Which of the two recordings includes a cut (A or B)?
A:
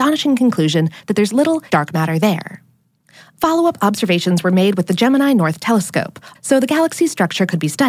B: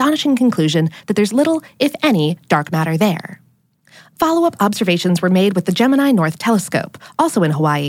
A